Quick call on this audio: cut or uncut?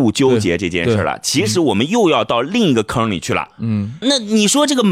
cut